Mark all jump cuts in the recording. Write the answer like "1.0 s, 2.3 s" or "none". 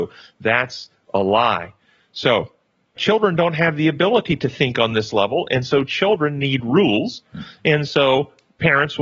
none